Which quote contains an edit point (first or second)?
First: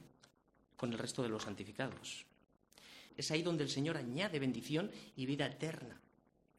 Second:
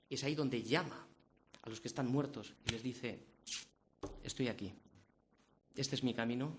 first